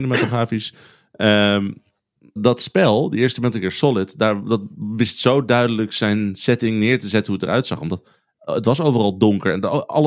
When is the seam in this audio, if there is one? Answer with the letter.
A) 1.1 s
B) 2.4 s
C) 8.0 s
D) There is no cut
B